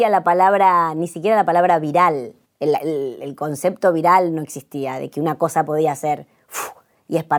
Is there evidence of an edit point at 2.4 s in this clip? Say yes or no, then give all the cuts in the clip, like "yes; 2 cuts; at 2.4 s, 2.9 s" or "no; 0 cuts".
yes; 1 cut; at 2.4 s